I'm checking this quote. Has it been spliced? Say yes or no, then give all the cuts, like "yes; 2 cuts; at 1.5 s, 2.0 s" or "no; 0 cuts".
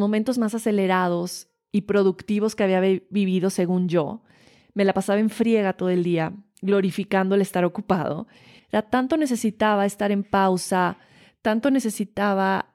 yes; 1 cut; at 8.6 s